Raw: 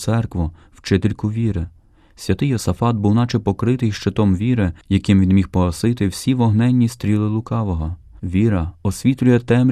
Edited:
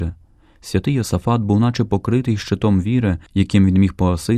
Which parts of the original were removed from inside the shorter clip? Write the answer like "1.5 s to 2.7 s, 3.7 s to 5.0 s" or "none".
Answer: none